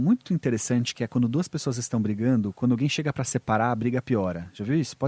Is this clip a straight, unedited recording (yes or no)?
yes